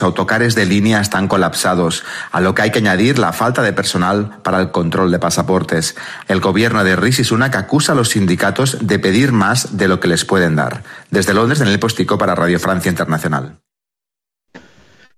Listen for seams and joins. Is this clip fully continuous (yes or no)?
no